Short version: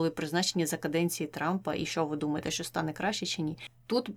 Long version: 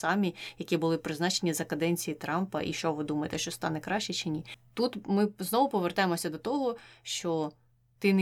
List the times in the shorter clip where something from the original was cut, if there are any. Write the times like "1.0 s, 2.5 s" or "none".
none